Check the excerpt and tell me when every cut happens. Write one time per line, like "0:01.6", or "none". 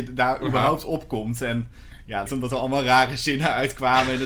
0:02.3